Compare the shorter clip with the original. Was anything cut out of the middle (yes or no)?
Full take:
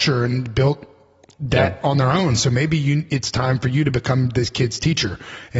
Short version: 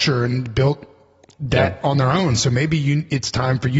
no